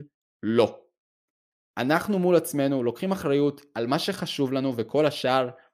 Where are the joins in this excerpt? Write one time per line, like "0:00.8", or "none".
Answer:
none

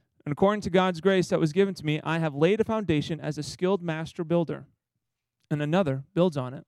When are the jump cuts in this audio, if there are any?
none

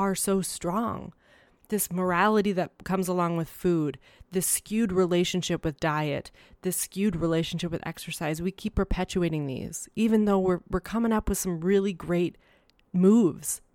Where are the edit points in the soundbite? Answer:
none

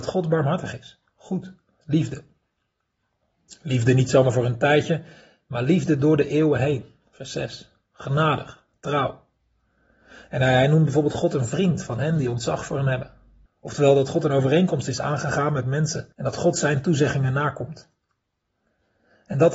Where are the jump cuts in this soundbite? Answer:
0:13.5
0:16.1

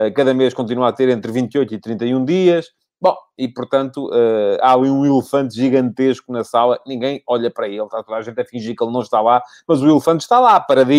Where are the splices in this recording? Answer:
none

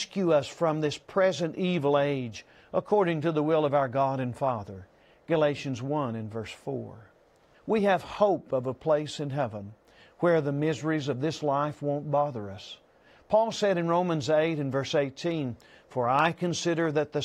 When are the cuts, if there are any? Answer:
0:07.5

